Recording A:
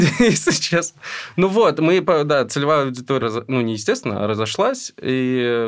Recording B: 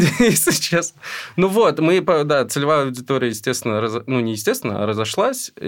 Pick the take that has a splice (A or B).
A